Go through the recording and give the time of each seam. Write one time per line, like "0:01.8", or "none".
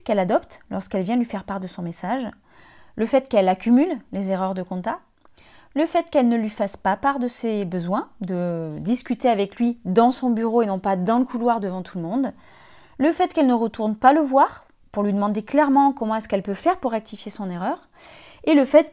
none